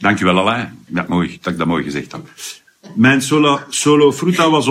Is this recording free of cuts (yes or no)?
no